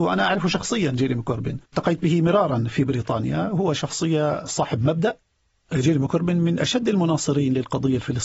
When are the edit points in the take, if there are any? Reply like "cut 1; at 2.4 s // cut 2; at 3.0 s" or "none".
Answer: cut 1; at 1.7 s